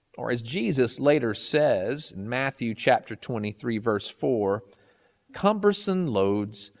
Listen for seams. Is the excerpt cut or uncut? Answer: cut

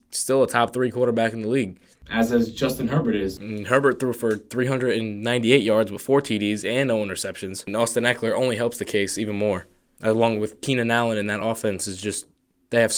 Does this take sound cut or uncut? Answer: uncut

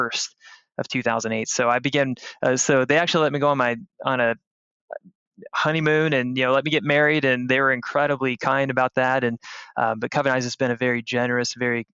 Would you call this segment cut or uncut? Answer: uncut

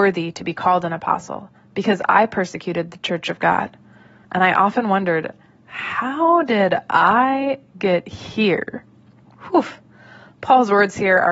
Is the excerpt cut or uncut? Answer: cut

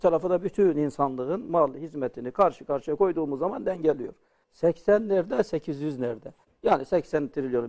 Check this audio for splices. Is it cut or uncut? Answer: cut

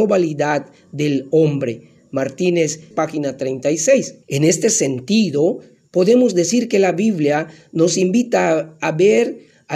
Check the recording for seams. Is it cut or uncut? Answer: cut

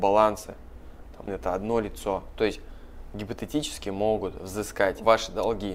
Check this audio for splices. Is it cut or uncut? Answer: cut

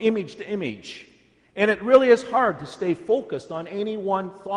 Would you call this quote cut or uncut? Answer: uncut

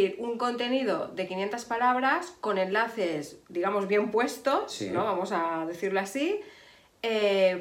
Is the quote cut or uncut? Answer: uncut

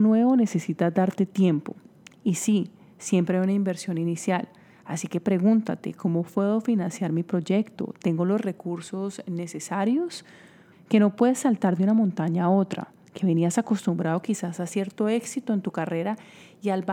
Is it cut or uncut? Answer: cut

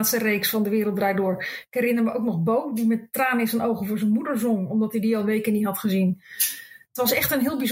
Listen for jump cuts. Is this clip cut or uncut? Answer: uncut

